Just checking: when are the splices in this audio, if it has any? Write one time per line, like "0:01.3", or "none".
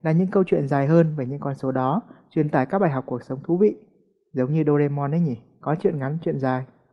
none

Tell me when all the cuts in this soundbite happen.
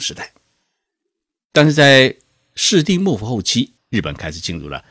0:01.3
0:03.8

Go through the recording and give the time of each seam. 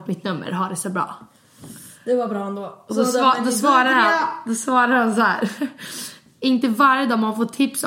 none

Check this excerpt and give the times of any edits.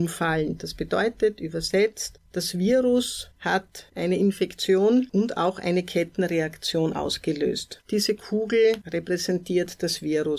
0:07.8

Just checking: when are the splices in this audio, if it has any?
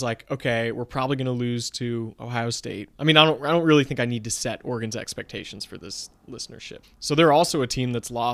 0:02.9
0:06.8

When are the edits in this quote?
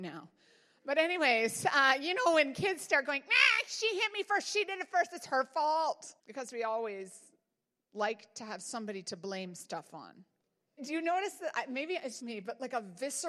0:06.2
0:10.8
0:12.2

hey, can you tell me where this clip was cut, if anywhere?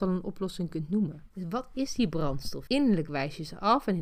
0:01.3
0:02.7

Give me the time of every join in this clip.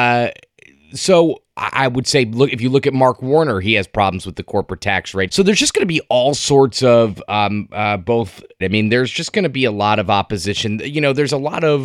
0:05.3
0:08.6

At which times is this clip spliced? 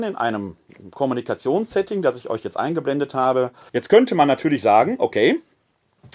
0:03.7

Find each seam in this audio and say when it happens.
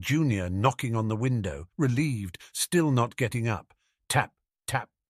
0:01.7

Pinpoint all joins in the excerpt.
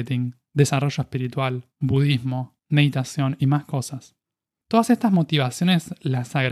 0:01.7

